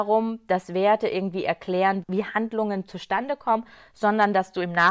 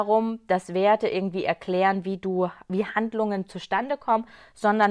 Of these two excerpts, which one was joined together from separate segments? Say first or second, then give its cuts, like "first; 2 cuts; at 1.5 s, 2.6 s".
first; 1 cut; at 2.0 s